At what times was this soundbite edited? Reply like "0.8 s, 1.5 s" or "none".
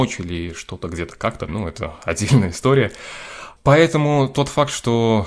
1.5 s